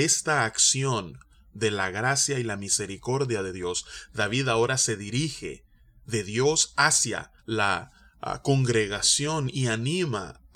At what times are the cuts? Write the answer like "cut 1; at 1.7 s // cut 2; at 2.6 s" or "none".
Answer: cut 1; at 7.4 s